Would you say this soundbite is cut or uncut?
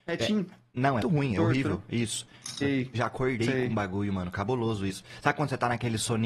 cut